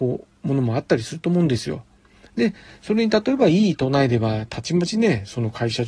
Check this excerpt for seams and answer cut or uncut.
uncut